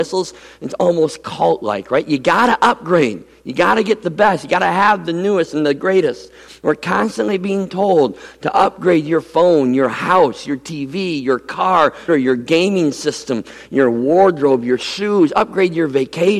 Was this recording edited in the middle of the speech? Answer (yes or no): yes